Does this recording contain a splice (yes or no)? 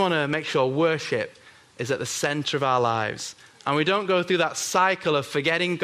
no